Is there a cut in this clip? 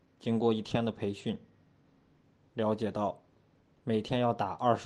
no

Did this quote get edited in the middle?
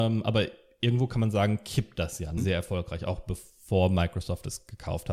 yes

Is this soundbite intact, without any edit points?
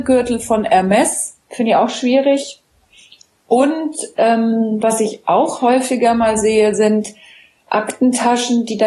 yes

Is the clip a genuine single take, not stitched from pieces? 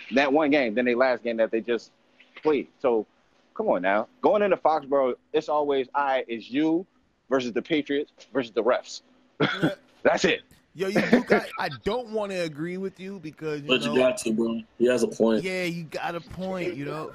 no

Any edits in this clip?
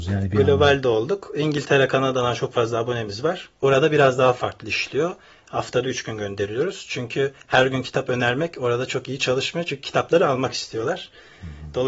no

